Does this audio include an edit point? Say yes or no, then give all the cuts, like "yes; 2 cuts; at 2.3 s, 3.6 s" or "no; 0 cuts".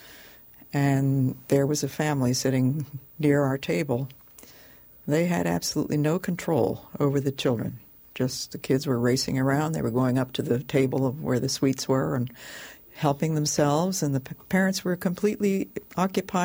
no; 0 cuts